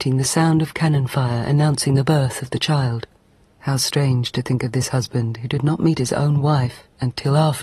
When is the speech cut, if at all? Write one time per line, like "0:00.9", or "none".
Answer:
0:03.5